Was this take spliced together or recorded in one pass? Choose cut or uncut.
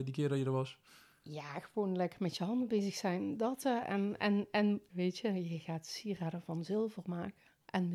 cut